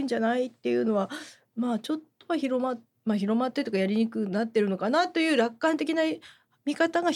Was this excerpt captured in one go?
yes; 0 cuts

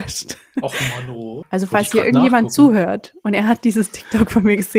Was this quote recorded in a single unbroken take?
no; 1 cut; at 1.4 s

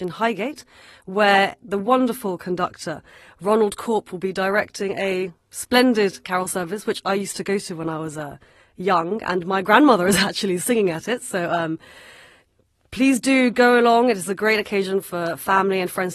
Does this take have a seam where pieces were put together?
no; 0 cuts

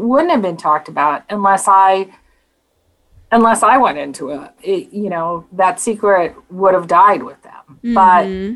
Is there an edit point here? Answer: yes; 1 cut; at 4.6 s

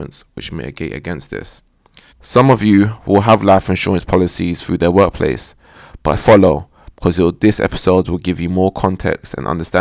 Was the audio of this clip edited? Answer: yes; 2 cuts; at 2.1 s, 6.2 s

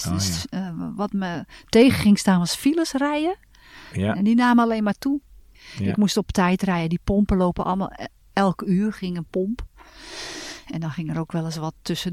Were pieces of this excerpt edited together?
no; 0 cuts

